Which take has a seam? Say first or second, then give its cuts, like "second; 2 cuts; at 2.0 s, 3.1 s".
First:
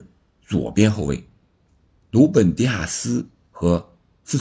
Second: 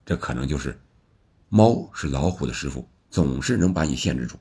second; 2 cuts; at 1.4 s, 3.0 s